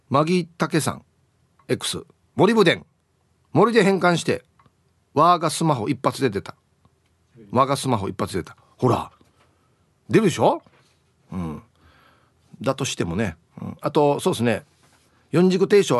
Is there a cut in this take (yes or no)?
no